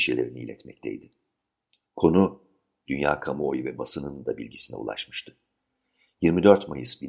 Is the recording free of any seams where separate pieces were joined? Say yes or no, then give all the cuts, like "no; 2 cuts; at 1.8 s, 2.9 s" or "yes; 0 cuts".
yes; 0 cuts